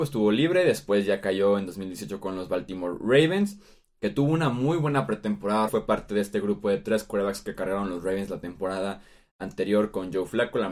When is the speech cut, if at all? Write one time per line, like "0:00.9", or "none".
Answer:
0:05.7